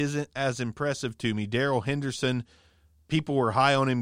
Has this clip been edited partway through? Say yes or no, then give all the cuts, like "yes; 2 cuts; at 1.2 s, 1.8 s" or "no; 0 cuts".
no; 0 cuts